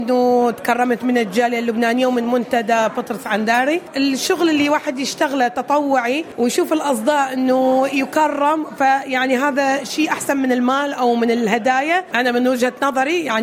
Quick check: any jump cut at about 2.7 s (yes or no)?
no